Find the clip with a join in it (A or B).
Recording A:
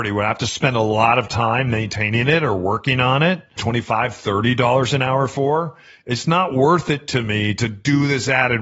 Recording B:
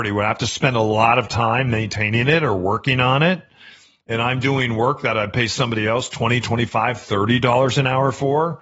A